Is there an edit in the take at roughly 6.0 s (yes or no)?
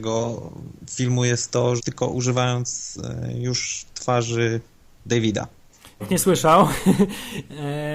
yes